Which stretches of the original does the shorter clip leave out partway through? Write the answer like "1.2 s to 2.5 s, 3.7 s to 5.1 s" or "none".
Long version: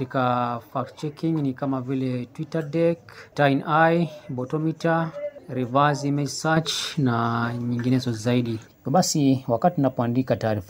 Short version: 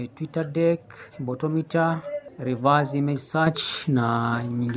3.3 s to 4.2 s